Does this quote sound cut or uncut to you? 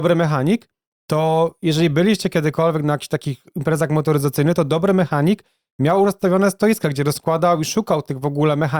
uncut